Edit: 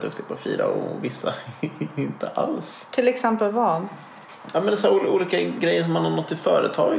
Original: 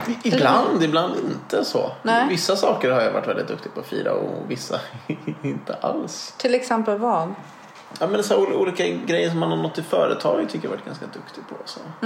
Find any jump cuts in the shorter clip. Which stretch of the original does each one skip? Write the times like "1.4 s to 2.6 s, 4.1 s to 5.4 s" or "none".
none